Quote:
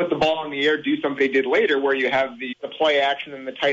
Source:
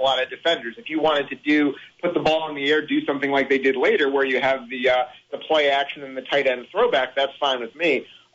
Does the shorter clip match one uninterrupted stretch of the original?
no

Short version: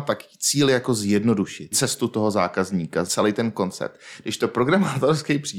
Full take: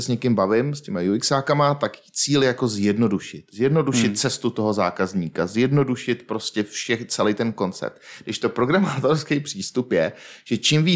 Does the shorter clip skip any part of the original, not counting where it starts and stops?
yes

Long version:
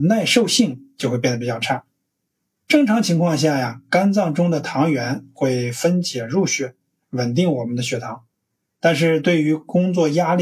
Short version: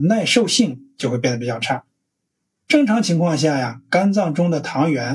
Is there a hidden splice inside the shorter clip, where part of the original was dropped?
no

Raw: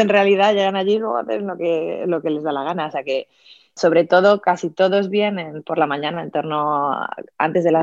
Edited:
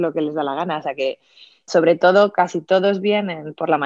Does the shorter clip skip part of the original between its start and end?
no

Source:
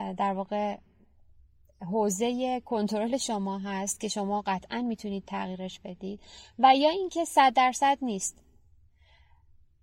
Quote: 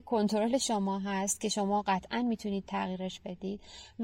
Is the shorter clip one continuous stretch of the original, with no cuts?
yes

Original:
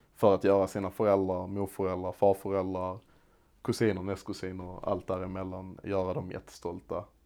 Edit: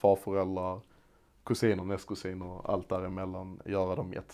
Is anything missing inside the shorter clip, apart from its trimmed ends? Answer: no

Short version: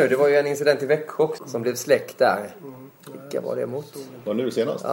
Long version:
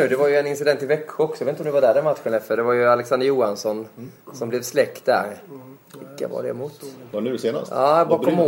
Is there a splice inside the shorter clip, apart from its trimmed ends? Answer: yes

